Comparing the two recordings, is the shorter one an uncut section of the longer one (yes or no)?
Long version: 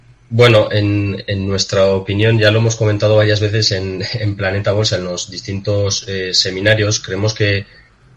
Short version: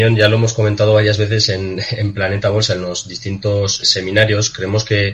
no